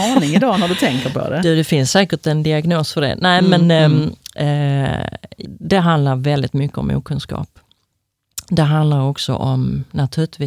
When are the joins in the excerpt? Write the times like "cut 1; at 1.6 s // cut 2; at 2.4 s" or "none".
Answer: cut 1; at 5.4 s

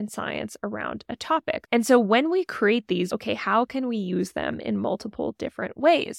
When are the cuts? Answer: cut 1; at 1.6 s // cut 2; at 3.1 s

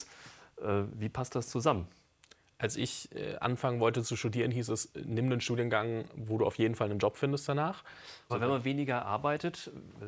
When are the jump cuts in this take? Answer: cut 1; at 8.3 s

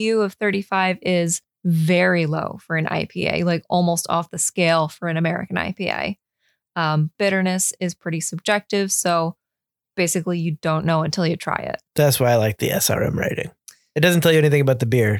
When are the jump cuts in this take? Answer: cut 1; at 7.1 s // cut 2; at 11.9 s

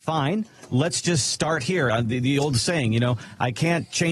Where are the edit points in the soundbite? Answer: none

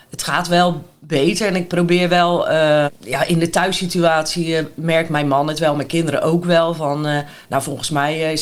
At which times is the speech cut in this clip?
cut 1; at 2.9 s

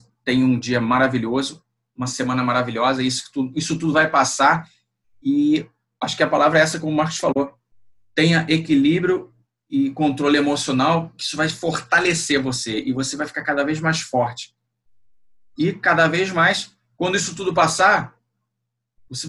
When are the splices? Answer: none

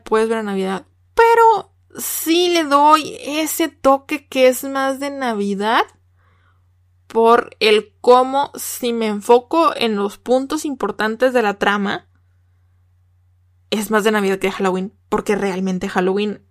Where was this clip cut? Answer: none

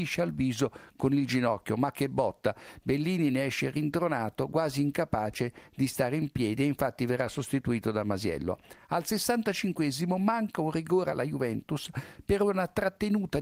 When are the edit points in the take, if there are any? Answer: none

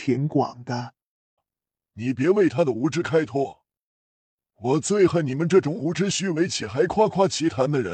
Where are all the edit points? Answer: cut 1; at 1.4 s

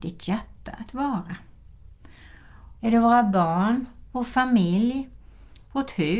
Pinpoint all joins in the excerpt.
cut 1; at 2.8 s

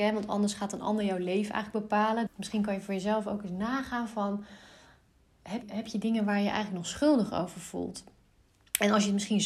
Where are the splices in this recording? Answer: cut 1; at 2.3 s // cut 2; at 5.6 s

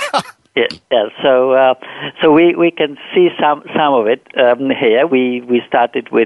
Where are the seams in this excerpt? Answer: cut 1; at 5.1 s

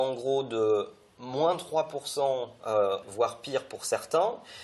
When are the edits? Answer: cut 1; at 3.0 s

